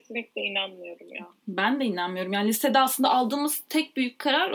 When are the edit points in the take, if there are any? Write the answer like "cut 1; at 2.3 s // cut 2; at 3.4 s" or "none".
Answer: none

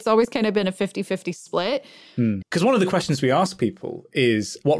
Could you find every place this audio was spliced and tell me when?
cut 1; at 2.4 s

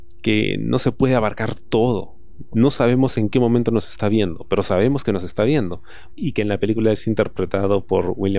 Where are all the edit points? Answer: cut 1; at 2.5 s // cut 2; at 6.1 s

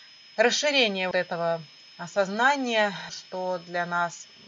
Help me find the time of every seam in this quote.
cut 1; at 1.1 s // cut 2; at 3.1 s

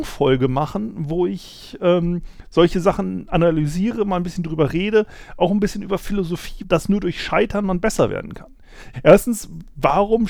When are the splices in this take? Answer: cut 1; at 6.6 s // cut 2; at 8.9 s

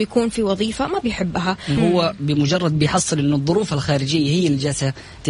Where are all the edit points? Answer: cut 1; at 1.8 s

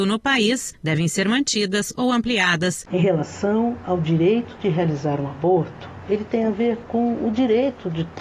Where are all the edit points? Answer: cut 1; at 2.9 s

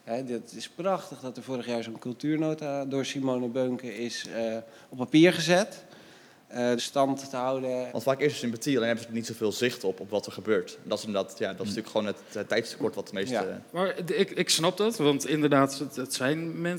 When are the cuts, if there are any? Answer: cut 1; at 6.8 s // cut 2; at 7.9 s

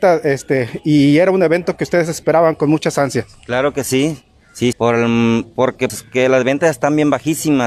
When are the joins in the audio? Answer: cut 1; at 4.7 s // cut 2; at 5.9 s

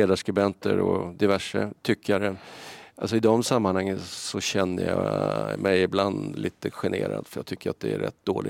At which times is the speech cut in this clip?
none

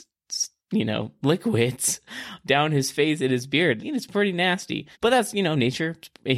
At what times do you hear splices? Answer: cut 1; at 3.8 s // cut 2; at 4.9 s

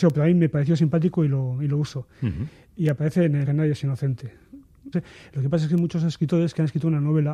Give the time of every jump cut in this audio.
cut 1; at 3.4 s // cut 2; at 4.9 s

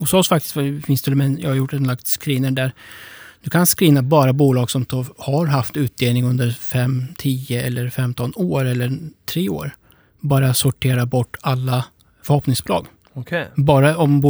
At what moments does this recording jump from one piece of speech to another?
none

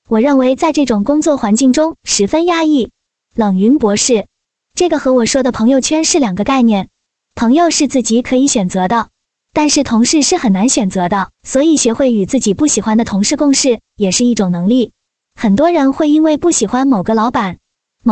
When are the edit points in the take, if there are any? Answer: cut 1; at 11.3 s

